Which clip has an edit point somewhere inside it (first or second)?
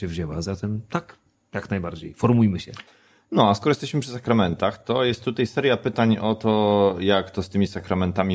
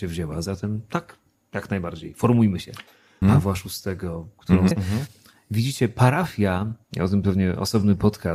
second